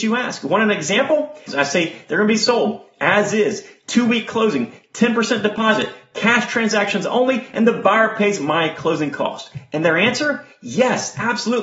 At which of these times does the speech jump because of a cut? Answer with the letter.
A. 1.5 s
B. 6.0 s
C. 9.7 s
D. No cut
A